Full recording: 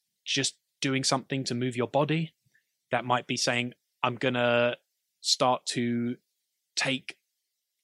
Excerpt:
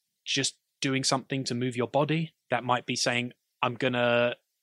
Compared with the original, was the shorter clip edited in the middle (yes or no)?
yes